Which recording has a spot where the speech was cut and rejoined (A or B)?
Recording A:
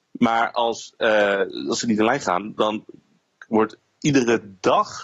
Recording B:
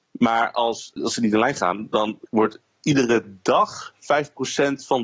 B